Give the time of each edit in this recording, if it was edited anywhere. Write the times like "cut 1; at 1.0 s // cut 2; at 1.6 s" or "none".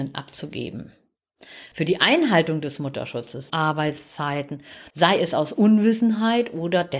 cut 1; at 1.7 s // cut 2; at 3.5 s // cut 3; at 4.9 s